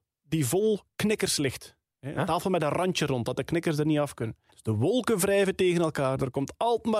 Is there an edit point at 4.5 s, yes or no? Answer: yes